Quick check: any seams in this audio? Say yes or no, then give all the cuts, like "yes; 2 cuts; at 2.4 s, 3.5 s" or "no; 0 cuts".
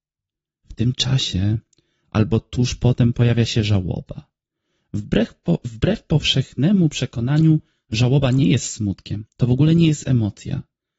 no; 0 cuts